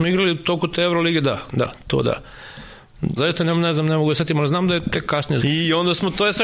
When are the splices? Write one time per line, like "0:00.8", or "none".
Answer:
0:03.2
0:05.4